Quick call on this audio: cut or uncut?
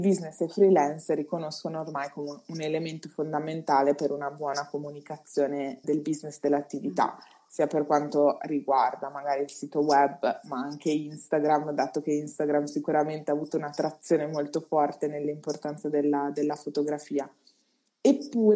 cut